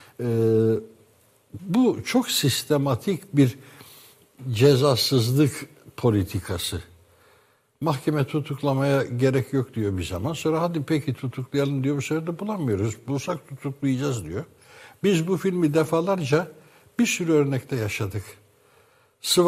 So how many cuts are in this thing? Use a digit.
0